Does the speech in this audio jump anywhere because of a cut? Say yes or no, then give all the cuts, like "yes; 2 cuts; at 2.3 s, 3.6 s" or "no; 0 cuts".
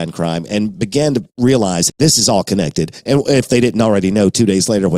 yes; 1 cut; at 1.9 s